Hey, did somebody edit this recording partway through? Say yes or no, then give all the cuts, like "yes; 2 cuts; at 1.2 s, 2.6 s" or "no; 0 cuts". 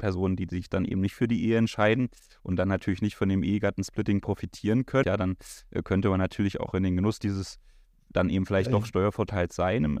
yes; 1 cut; at 5.0 s